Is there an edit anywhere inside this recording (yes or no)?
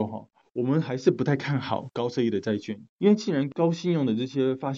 yes